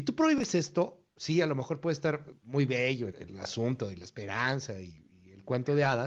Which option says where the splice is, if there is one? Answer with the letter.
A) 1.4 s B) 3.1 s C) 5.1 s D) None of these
B